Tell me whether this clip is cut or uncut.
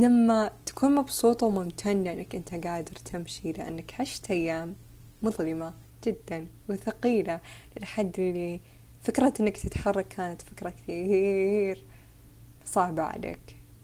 cut